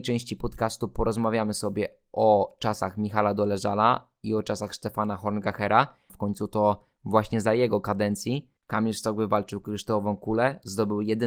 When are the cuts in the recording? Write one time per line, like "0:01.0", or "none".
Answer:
0:06.1
0:08.6